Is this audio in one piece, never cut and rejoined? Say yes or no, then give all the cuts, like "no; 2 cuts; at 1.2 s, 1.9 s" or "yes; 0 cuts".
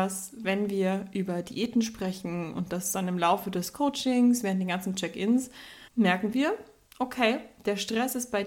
no; 1 cut; at 5.9 s